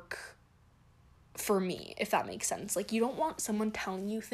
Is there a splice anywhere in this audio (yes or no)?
no